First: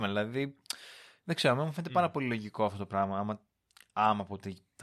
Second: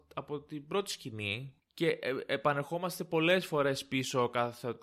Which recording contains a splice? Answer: second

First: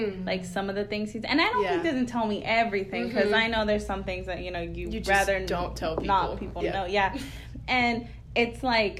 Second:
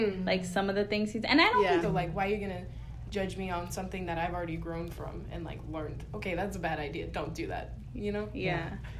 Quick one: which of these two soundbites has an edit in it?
second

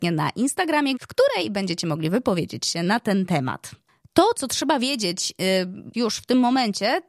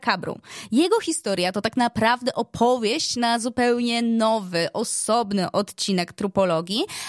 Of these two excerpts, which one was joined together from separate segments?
first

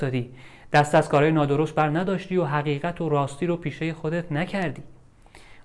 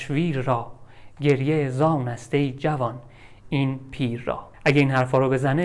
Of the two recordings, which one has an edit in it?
second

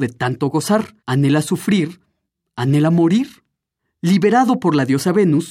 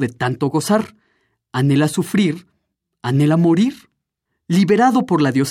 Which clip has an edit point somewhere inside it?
first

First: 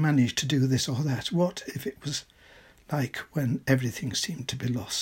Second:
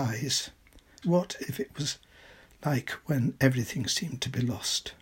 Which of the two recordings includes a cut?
second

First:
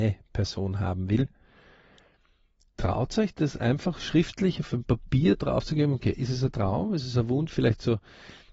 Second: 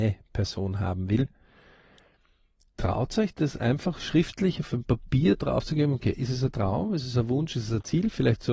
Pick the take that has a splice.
first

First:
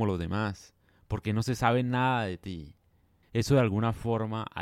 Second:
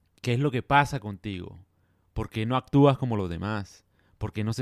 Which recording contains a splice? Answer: first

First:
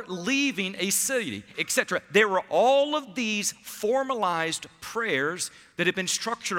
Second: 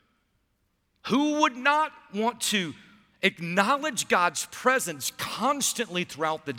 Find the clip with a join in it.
first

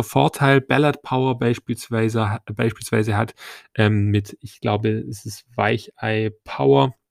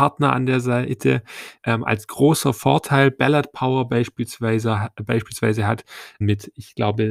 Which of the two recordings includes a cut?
second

